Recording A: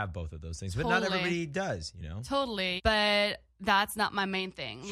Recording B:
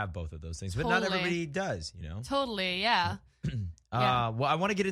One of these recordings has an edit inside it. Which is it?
A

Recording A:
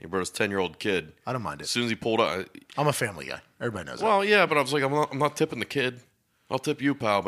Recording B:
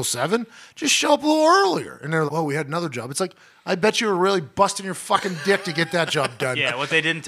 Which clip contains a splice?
B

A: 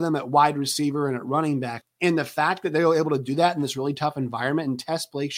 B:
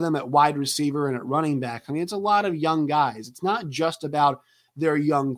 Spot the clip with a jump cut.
A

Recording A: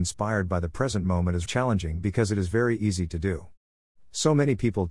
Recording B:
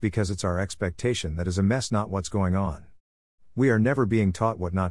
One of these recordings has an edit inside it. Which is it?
A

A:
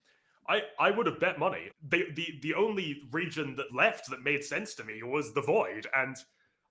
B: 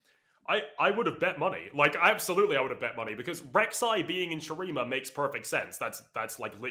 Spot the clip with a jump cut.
A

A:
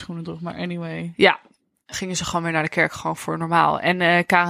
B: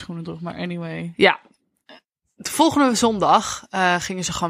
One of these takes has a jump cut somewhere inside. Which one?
A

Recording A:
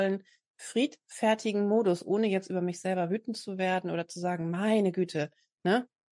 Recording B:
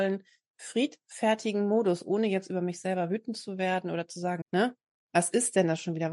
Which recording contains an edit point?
B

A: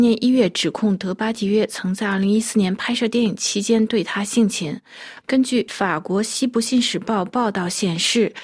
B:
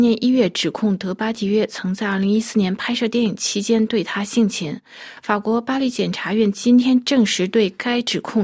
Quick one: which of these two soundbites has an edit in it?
A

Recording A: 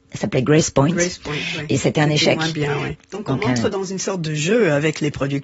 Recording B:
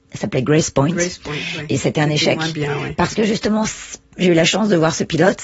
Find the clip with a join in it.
A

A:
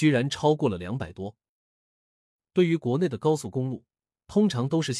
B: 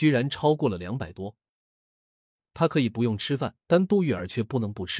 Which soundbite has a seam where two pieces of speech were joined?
B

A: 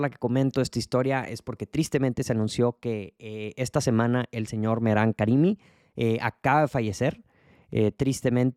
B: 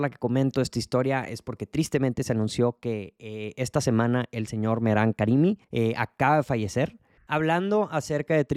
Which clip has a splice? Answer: B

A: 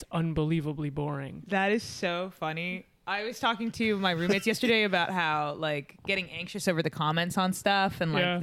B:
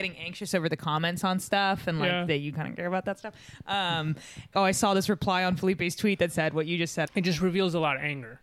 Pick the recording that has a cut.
B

